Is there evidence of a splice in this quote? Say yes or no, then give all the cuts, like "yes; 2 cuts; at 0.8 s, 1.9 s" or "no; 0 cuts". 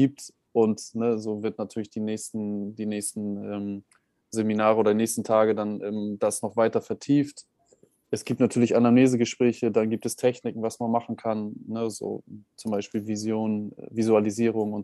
no; 0 cuts